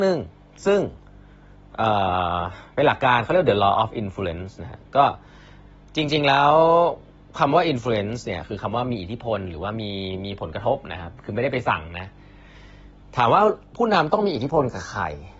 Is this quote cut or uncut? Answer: uncut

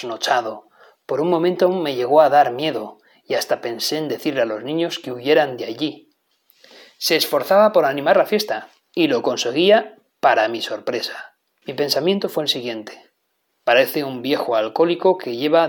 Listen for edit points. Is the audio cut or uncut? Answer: cut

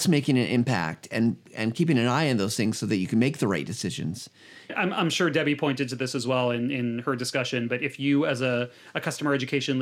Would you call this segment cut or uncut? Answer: uncut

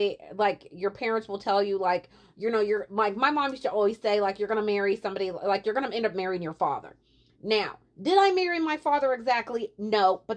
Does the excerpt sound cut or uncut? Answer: uncut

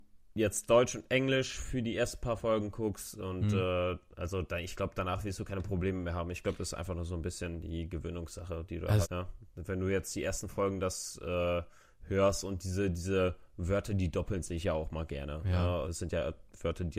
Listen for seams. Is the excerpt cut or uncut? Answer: cut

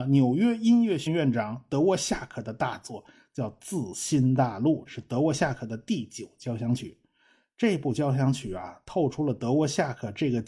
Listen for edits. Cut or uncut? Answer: cut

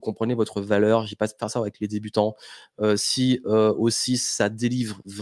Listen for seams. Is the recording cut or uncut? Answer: uncut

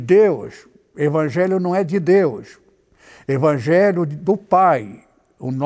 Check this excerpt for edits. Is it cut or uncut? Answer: uncut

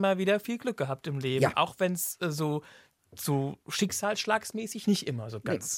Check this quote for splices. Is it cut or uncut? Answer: uncut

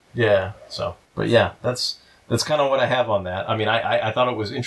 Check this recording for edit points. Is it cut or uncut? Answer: cut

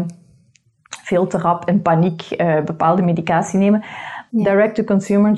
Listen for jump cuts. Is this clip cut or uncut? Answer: cut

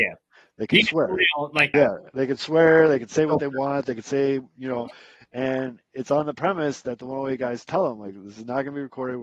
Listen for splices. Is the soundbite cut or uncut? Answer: cut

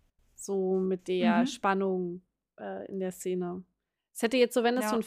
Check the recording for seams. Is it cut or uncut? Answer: uncut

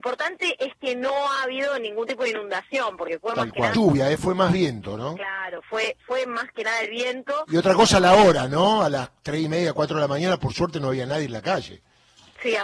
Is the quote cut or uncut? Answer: cut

